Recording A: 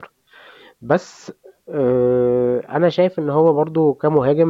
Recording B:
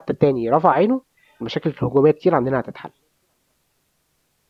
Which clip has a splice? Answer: B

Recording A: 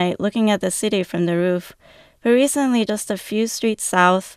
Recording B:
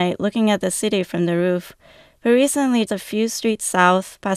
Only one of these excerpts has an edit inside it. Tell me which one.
B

